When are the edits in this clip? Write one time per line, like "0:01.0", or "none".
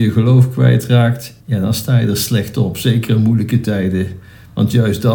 0:01.4